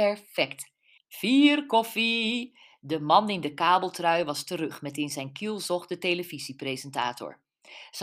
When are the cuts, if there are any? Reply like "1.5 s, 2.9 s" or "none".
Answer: 1.0 s